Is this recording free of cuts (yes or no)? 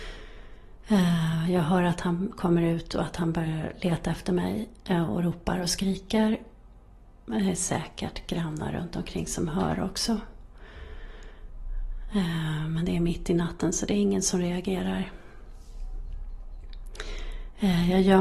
yes